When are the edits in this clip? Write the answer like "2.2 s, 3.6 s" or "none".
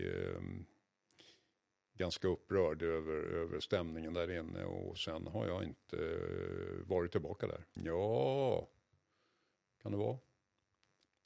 7.8 s